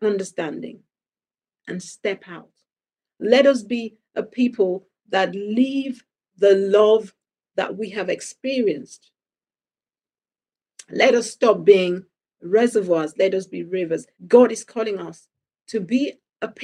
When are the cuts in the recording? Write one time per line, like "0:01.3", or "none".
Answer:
0:14.1